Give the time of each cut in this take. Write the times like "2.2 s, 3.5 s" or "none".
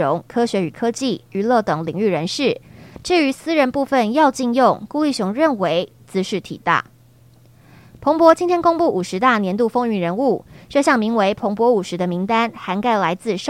1.3 s, 3.0 s